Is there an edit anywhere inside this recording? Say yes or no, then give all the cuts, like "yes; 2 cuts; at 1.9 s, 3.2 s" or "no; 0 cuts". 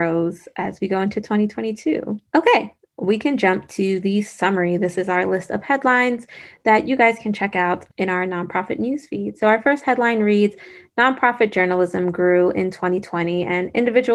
no; 0 cuts